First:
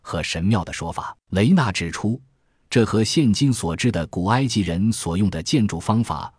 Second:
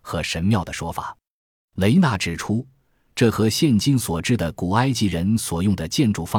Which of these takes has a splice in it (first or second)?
first